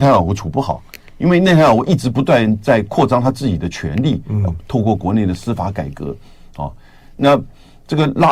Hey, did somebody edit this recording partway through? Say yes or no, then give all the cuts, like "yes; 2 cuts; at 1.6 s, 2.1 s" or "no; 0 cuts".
no; 0 cuts